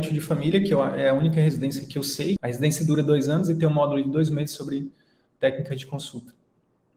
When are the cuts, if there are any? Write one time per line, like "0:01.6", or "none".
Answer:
0:02.4